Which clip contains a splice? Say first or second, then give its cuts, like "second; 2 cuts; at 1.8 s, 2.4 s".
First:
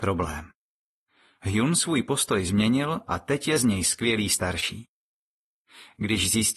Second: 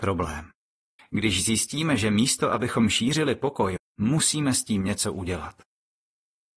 second; 2 cuts; at 1.0 s, 3.8 s